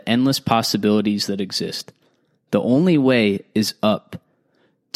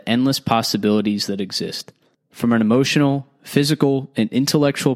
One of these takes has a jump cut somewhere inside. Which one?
second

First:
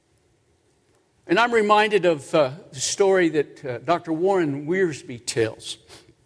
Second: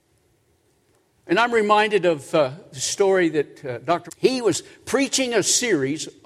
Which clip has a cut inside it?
second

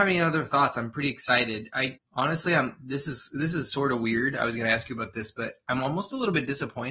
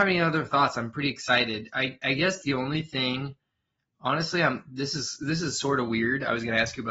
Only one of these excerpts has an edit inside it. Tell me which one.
first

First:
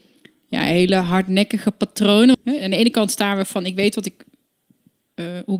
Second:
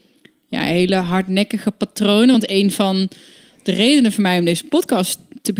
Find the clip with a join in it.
first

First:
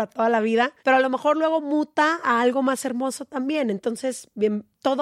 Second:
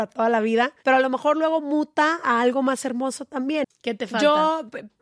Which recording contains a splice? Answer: second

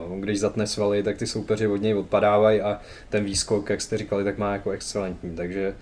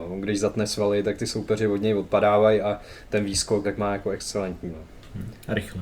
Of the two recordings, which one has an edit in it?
second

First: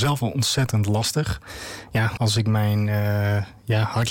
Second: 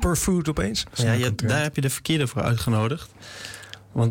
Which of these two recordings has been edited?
first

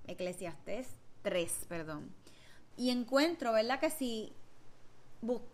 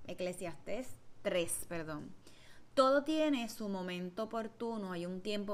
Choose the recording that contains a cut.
first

